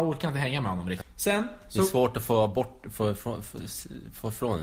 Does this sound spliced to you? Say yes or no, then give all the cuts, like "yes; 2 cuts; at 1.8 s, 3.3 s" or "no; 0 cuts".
yes; 1 cut; at 1.0 s